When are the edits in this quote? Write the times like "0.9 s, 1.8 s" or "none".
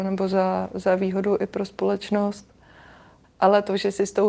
3.2 s